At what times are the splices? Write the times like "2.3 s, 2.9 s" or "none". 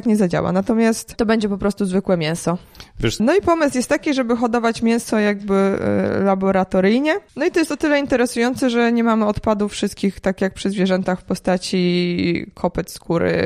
3.2 s